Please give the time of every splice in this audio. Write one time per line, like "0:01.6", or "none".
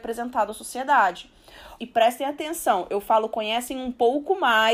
0:01.8